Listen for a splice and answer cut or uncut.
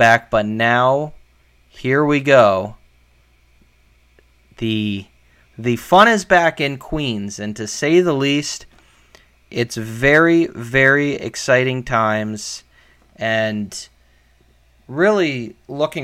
uncut